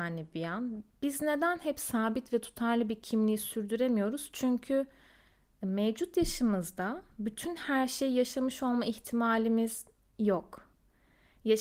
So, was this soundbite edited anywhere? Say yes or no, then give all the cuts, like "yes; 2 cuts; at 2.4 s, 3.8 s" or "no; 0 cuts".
no; 0 cuts